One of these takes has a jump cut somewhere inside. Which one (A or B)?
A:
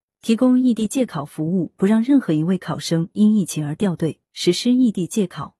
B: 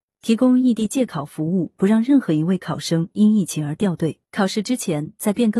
B